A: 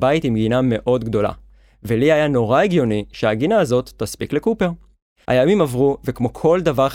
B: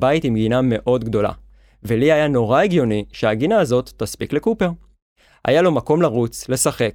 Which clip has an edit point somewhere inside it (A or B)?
A